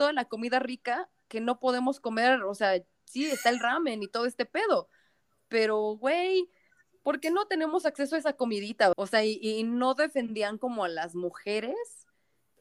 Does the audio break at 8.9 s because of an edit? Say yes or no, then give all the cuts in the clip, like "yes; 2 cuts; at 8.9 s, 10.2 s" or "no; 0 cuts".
yes; 1 cut; at 8.9 s